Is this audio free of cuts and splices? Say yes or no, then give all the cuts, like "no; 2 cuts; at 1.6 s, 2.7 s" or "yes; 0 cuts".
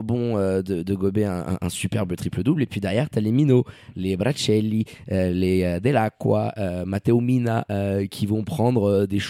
yes; 0 cuts